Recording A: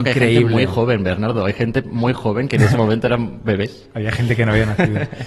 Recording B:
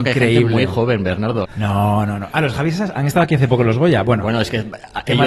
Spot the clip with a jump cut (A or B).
B